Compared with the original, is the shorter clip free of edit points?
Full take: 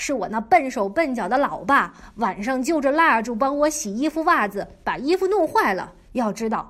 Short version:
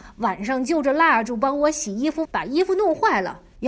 no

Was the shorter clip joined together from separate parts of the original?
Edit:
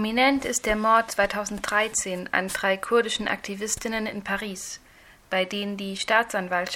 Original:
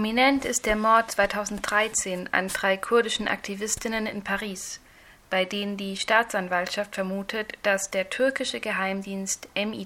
no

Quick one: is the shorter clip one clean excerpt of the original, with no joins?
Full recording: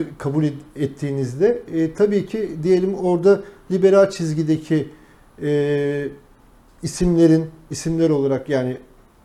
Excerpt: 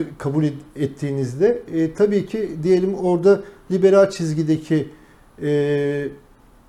yes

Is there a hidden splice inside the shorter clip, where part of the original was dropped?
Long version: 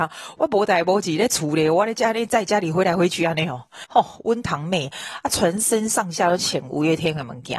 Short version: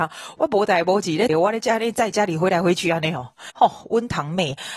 yes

